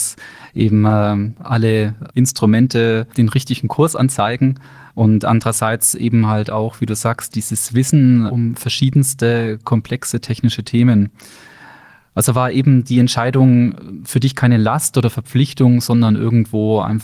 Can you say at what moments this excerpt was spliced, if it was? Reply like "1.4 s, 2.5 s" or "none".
none